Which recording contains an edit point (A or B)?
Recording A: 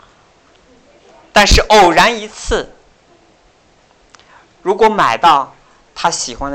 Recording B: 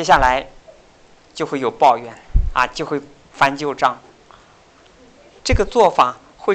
B